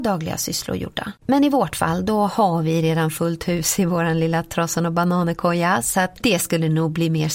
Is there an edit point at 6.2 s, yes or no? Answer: no